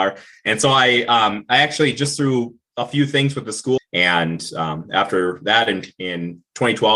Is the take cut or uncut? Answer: cut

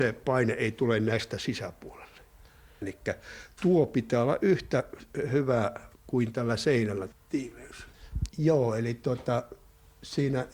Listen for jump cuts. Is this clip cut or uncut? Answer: cut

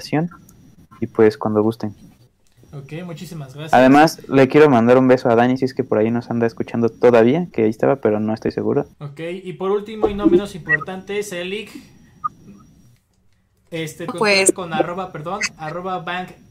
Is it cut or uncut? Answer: cut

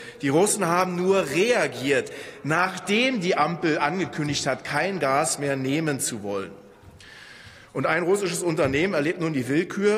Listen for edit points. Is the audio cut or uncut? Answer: uncut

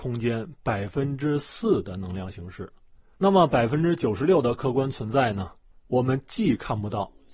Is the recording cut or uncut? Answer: uncut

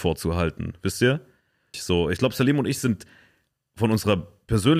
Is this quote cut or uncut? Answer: cut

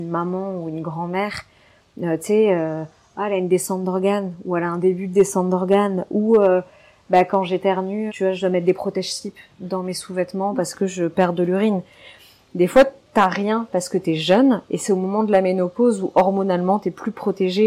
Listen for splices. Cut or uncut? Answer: cut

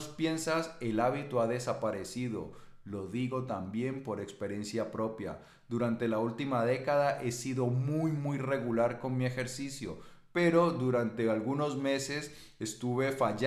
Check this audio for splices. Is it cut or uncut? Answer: uncut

